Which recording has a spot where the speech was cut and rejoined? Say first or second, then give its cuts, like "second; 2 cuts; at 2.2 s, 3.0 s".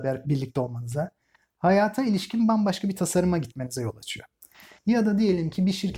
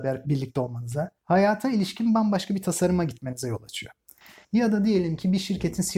second; 1 cut; at 1.2 s